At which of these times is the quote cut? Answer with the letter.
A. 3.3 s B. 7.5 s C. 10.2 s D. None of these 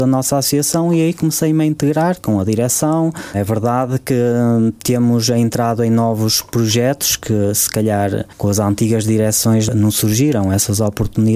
A